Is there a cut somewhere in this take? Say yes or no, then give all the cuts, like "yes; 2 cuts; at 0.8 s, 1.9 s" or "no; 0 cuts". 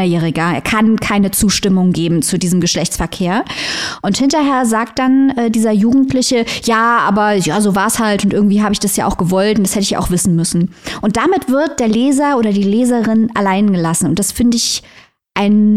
no; 0 cuts